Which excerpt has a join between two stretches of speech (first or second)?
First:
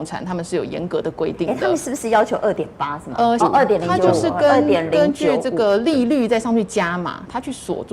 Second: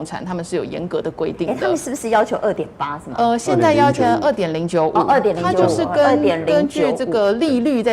first